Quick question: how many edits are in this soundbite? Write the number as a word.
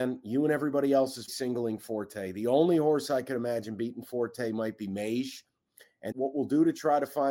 two